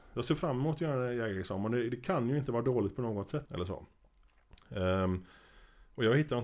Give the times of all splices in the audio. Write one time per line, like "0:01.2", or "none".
0:03.5